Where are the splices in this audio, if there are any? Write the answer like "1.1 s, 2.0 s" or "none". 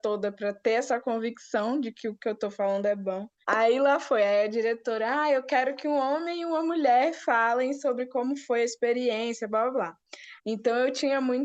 3.4 s, 10.4 s